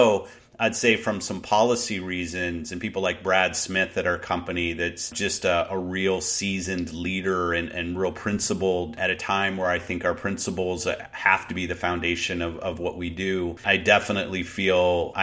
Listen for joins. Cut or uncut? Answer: cut